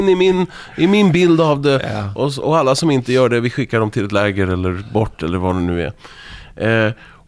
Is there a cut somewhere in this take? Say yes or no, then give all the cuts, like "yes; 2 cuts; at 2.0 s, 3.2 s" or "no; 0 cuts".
no; 0 cuts